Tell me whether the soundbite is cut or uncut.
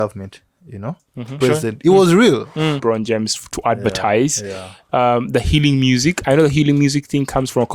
cut